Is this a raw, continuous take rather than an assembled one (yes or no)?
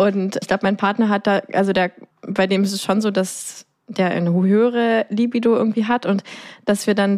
no